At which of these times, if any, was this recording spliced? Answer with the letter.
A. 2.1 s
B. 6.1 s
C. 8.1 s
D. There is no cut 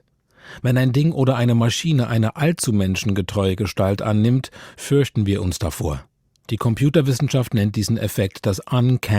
D